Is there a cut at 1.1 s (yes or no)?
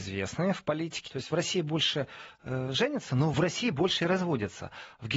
yes